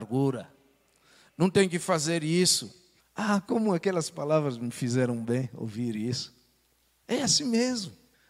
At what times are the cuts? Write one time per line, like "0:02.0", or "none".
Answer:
0:03.0